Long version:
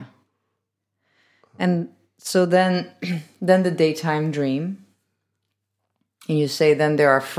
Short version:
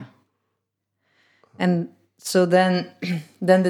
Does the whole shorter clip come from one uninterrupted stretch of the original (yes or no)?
yes